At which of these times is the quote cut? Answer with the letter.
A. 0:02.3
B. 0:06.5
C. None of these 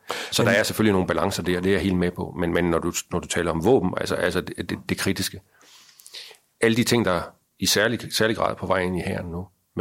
C